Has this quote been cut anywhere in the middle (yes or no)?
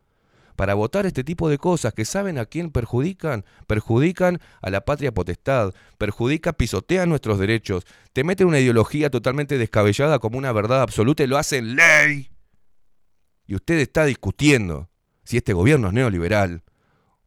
no